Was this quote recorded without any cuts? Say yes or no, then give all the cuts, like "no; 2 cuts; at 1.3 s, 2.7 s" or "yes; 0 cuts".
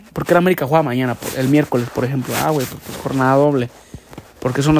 yes; 0 cuts